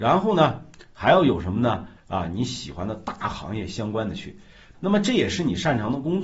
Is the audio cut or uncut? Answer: cut